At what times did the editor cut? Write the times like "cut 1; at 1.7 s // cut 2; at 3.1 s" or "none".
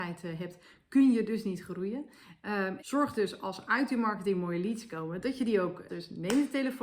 cut 1; at 2.8 s // cut 2; at 5.9 s